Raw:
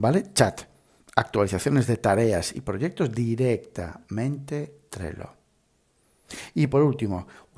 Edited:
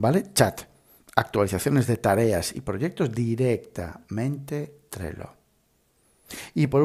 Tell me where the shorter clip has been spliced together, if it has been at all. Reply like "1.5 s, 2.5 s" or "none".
none